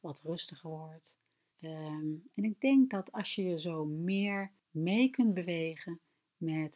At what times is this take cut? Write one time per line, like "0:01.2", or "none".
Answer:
0:01.5
0:04.6

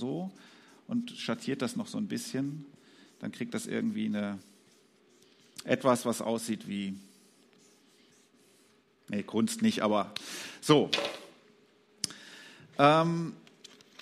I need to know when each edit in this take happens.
none

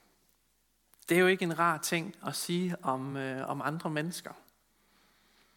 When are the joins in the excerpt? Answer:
none

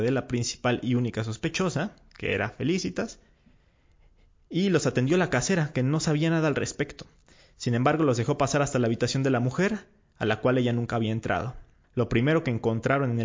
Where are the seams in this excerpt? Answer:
none

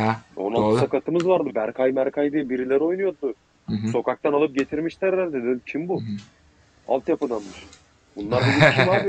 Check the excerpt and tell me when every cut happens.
0:01.5

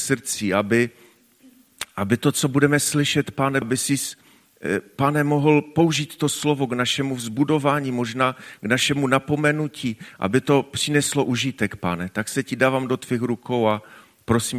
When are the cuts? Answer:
0:03.6

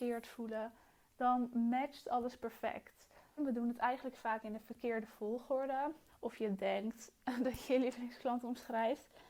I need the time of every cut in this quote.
0:03.4
0:06.1

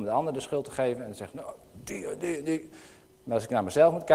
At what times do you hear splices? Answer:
none

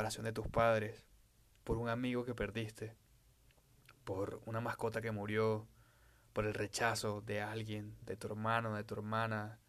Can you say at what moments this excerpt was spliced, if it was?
0:08.0

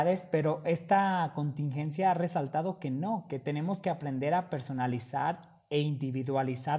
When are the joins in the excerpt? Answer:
none

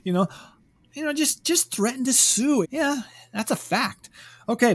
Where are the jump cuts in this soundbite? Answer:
0:02.6

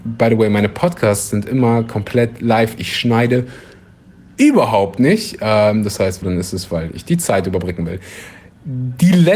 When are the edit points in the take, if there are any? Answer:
0:06.2

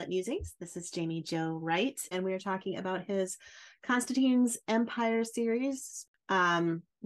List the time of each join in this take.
0:02.1

